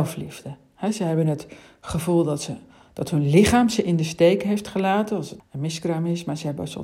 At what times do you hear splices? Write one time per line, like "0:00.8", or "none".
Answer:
0:05.4